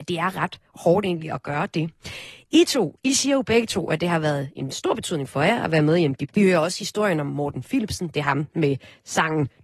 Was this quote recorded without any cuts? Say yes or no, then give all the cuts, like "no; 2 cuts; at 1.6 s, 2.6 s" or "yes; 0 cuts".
no; 1 cut; at 6.3 s